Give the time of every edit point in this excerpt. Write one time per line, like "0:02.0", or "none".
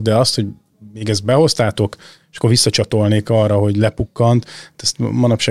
none